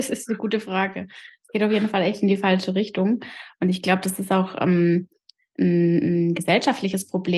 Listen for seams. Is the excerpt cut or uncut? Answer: uncut